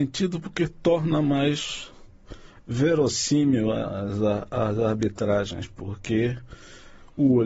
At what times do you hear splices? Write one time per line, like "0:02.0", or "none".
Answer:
none